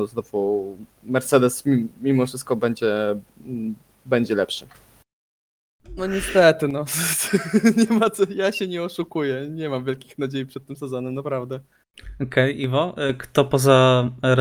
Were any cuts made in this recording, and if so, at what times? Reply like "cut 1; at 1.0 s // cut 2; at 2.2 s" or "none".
cut 1; at 6.0 s